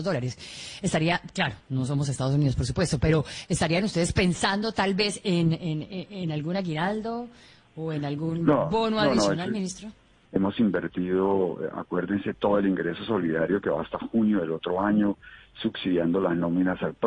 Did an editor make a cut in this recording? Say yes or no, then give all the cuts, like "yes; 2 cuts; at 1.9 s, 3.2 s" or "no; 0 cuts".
yes; 1 cut; at 10.3 s